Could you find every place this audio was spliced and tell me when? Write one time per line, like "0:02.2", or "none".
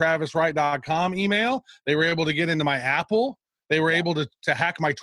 none